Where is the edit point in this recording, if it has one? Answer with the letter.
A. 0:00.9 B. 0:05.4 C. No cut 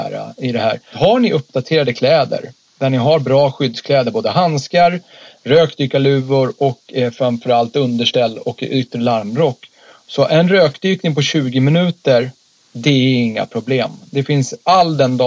A